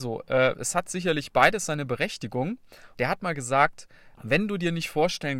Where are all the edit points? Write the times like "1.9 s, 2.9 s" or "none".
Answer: 2.9 s, 4.1 s